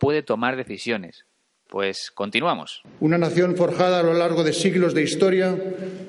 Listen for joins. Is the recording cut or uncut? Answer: cut